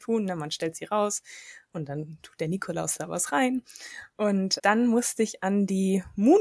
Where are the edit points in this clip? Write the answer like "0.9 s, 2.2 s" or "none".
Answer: 4.6 s